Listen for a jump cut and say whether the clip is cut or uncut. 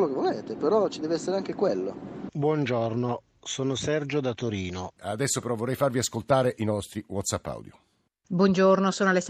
cut